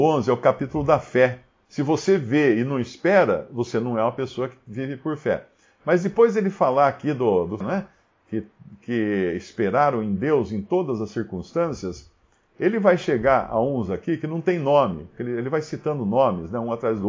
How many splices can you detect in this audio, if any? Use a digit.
2